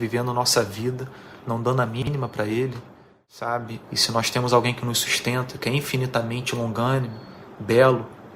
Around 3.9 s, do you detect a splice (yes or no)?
yes